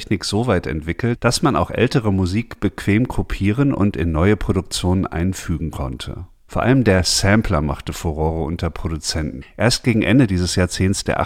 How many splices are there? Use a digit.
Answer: 1